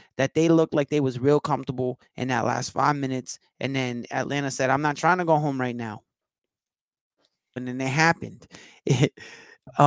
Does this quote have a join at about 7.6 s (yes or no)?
yes